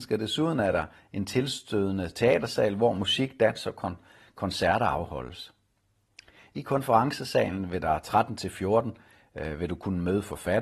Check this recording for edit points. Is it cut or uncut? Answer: uncut